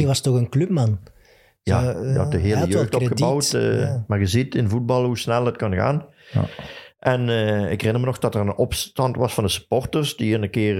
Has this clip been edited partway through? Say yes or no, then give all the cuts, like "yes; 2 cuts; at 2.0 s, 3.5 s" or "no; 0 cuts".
no; 0 cuts